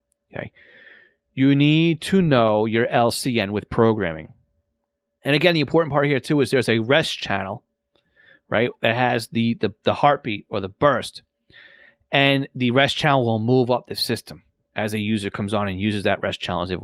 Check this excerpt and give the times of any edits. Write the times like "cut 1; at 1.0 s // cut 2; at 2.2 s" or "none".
none

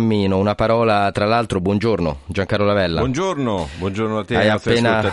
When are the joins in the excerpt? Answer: none

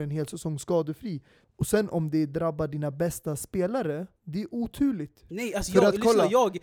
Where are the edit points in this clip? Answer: cut 1; at 1.4 s // cut 2; at 4.2 s // cut 3; at 5.3 s

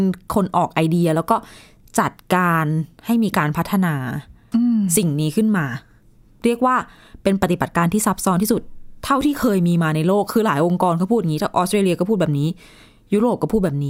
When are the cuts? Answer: none

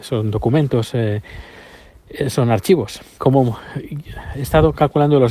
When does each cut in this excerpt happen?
cut 1; at 3.2 s

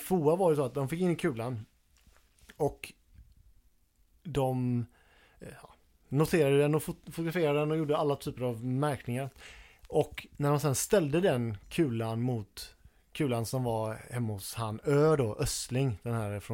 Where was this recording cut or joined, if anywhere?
none

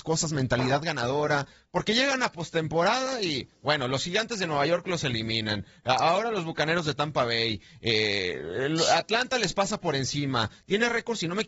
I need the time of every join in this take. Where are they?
none

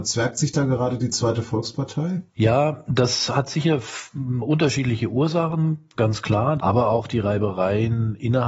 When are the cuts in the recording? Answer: cut 1; at 2.3 s // cut 2; at 6.6 s

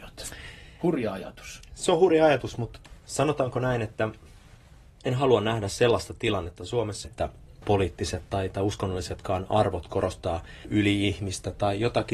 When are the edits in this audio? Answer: cut 1; at 7.0 s

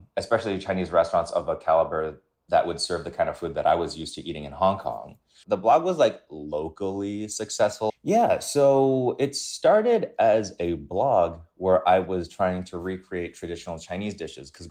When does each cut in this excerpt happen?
cut 1; at 5.4 s // cut 2; at 7.9 s

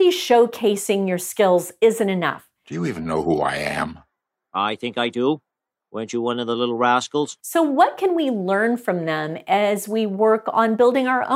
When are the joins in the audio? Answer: cut 1; at 2.6 s

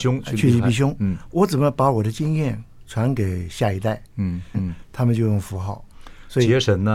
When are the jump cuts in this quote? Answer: cut 1; at 4.5 s

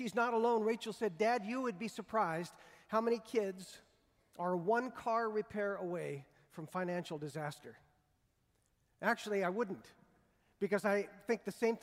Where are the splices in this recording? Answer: none

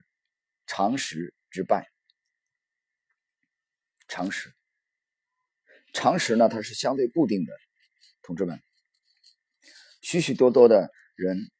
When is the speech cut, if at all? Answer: none

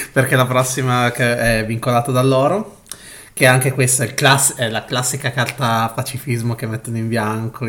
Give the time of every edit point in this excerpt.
none

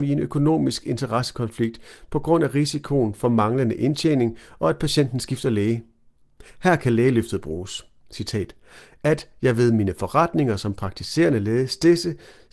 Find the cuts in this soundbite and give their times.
none

